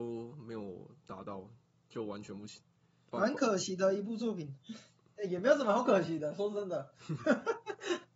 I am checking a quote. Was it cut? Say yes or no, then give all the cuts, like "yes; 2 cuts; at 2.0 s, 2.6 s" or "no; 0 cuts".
no; 0 cuts